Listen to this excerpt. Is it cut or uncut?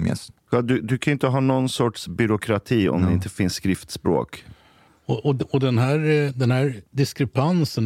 cut